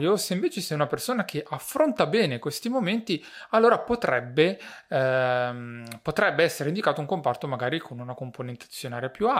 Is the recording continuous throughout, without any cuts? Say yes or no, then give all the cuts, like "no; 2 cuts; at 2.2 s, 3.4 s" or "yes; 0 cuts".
yes; 0 cuts